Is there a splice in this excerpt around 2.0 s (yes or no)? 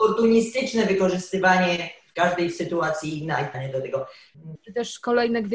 no